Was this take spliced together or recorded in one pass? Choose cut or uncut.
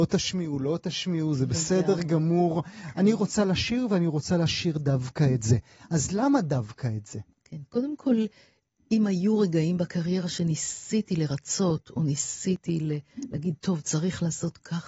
uncut